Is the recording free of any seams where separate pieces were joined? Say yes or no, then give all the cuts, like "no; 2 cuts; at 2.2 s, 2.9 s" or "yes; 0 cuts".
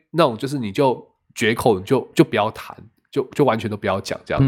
yes; 0 cuts